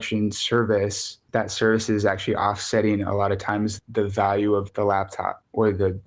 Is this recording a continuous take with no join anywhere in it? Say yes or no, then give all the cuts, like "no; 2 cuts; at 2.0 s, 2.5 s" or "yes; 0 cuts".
yes; 0 cuts